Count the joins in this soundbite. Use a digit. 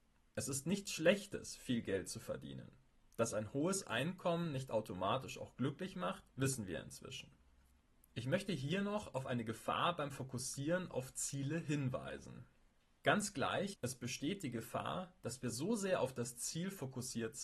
2